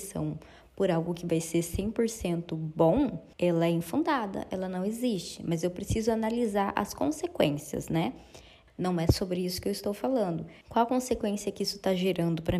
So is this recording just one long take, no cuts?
no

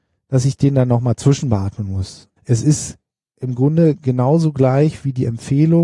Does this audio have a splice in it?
yes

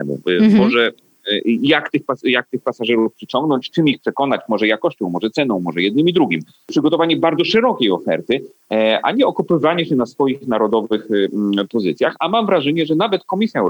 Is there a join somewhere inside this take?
no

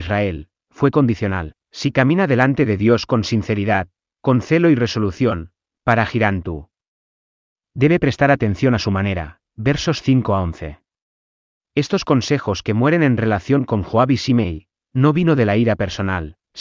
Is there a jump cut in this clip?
no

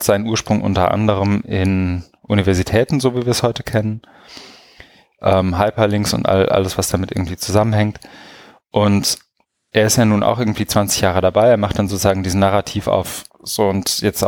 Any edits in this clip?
no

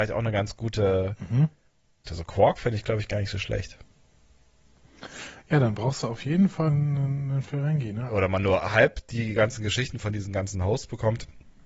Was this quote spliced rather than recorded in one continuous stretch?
yes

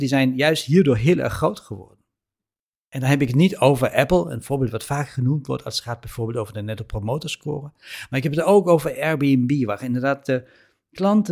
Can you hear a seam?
no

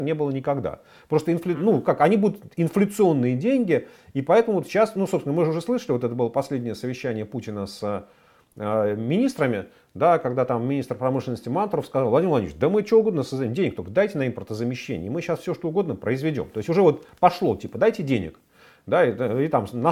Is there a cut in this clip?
no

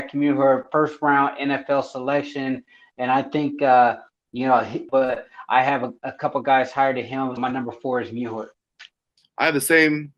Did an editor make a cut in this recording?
yes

